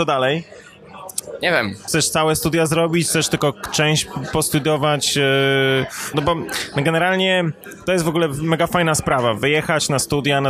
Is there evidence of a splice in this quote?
yes; 2 cuts; at 1.9 s, 6.1 s

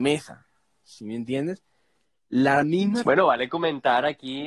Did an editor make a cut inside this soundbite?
yes; 1 cut; at 3.0 s

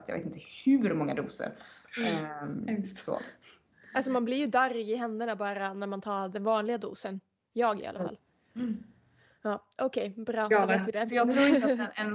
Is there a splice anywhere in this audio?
no; 0 cuts

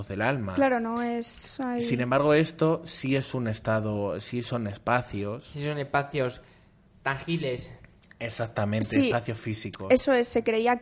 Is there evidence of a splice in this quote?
no; 0 cuts

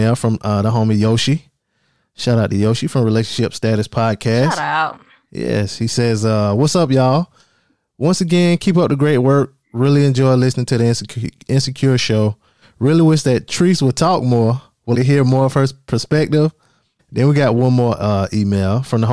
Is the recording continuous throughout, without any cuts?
no; 2 cuts; at 14.9 s, 17.0 s

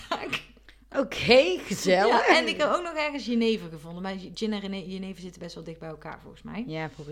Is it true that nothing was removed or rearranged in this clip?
yes; 0 cuts

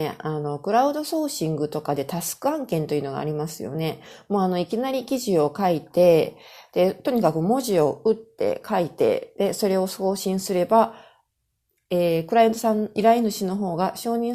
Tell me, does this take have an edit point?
no; 0 cuts

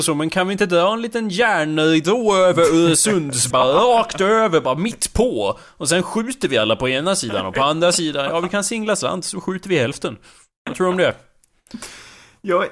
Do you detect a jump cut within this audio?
yes; 1 cut; at 3.5 s

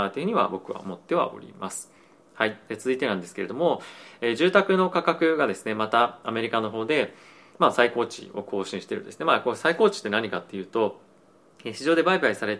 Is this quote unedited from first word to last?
yes; 0 cuts

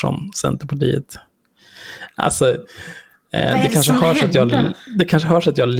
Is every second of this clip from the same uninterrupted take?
yes; 0 cuts

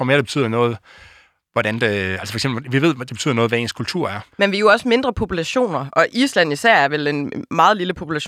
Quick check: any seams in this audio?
yes; 1 cut; at 4.3 s

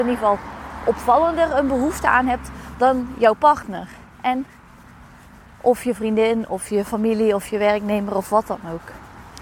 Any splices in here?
no; 0 cuts

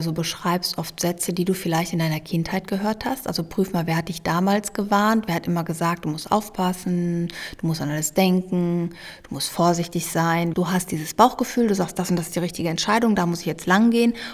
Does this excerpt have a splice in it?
yes; 1 cut; at 10.5 s

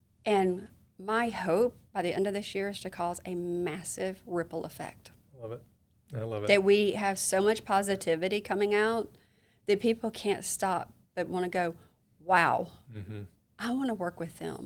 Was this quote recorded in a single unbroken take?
yes; 0 cuts

